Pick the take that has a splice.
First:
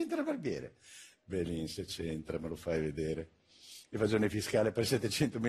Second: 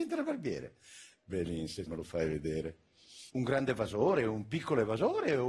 second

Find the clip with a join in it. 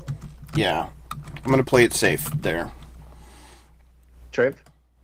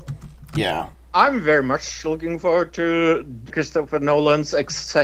second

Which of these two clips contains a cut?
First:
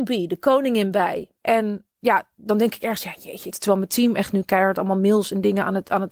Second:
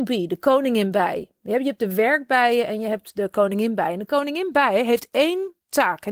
first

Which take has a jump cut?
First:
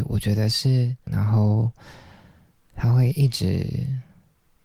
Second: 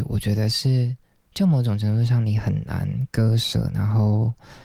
first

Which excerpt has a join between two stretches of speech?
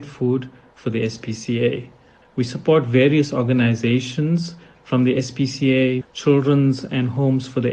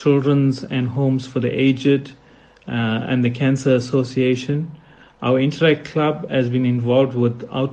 first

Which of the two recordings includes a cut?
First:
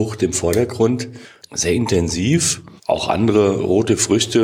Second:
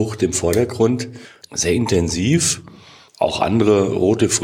first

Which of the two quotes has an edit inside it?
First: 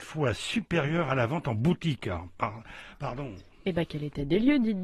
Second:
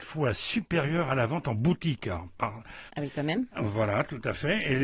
second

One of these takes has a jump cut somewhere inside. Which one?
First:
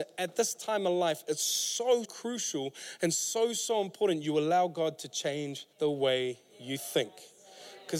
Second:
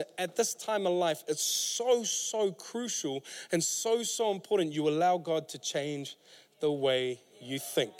first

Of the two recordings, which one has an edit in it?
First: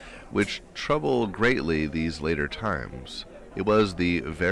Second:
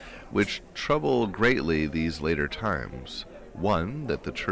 first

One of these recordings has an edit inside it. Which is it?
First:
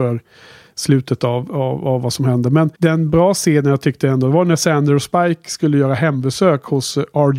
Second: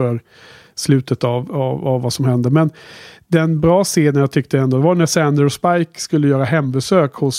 first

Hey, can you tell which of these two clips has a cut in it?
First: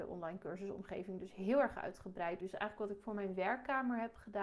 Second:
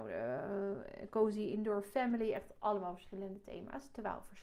first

